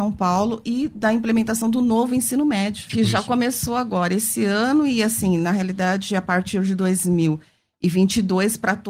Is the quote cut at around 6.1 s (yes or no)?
no